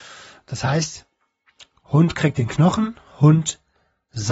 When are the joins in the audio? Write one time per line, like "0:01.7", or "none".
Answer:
none